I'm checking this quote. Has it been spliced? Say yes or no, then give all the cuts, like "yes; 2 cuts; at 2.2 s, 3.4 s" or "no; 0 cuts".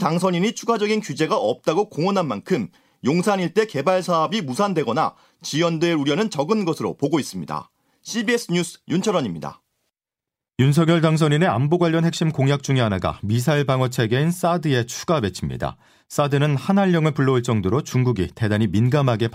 no; 0 cuts